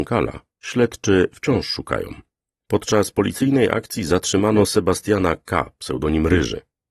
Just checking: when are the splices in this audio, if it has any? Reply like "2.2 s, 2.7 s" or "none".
none

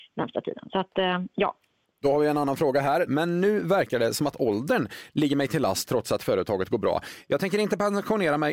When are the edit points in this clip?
3.1 s

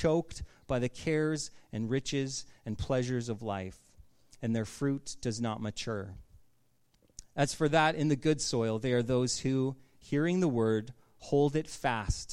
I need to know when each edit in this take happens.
none

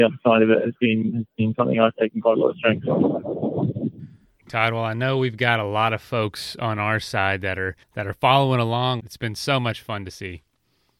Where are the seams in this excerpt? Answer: 7.8 s, 9.0 s

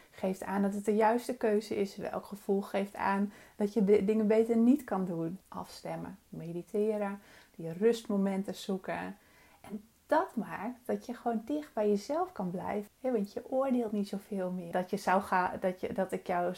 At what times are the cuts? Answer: 5.4 s, 12.9 s, 14.7 s

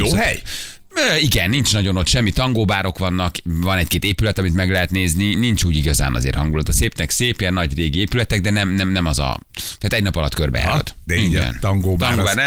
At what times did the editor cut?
11.1 s

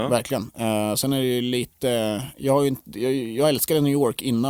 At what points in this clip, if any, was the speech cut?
none

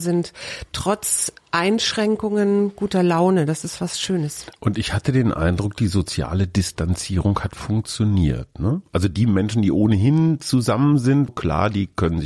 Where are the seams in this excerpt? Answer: 11.3 s

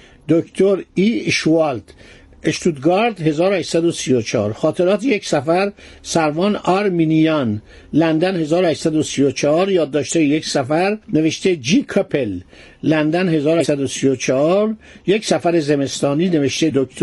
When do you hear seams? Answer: 11.0 s

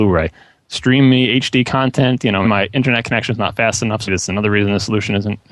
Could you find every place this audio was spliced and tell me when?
2.4 s, 4.1 s

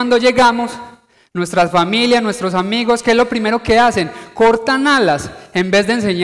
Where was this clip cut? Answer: none

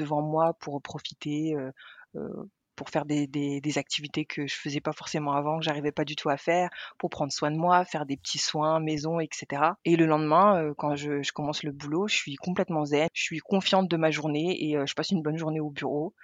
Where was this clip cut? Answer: 9.8 s, 13.1 s

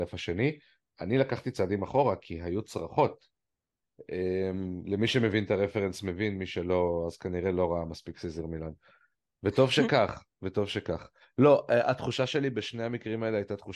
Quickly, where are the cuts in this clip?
3.8 s

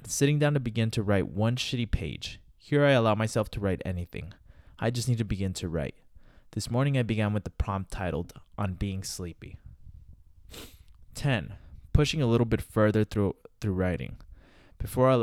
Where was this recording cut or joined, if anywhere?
none

